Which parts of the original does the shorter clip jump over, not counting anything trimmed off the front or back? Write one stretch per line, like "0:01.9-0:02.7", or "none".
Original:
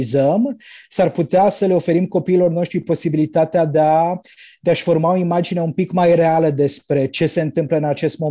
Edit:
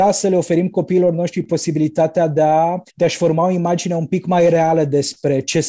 0:04.3-0:04.6